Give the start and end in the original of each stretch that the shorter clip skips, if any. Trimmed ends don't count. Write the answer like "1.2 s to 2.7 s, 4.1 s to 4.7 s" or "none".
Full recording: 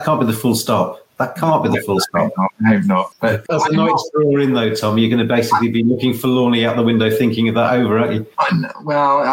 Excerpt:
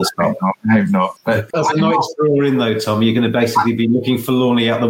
none